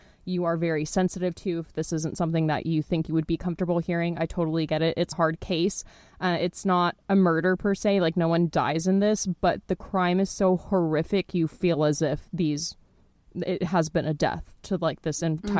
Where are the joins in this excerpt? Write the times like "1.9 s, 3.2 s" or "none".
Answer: 5.1 s